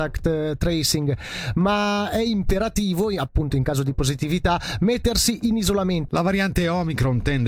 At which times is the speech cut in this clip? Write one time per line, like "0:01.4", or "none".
0:06.1